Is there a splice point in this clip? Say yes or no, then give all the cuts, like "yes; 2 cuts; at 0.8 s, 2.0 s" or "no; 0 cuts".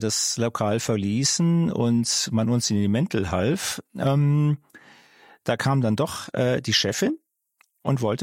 no; 0 cuts